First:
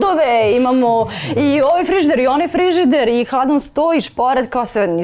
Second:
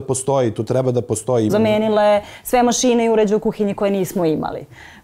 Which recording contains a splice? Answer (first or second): second